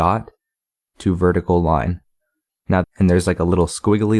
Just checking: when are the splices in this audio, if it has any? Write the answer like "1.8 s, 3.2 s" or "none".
2.8 s